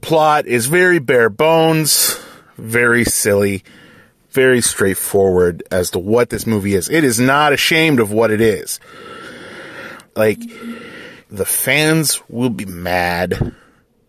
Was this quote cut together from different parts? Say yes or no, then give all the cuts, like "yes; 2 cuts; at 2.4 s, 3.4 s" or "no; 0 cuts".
yes; 2 cuts; at 10.1 s, 11.2 s